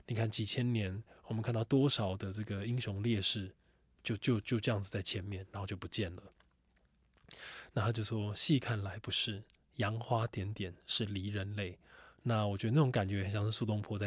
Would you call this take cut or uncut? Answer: uncut